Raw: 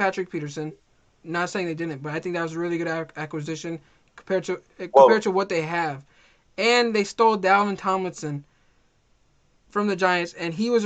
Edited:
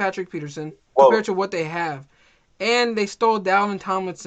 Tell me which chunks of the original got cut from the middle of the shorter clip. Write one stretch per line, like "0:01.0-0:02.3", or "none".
0:00.9-0:04.9